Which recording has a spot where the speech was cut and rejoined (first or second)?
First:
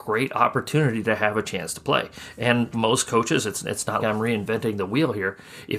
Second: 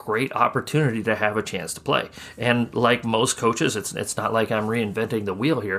first